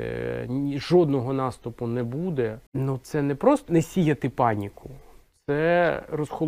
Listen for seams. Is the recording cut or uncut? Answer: cut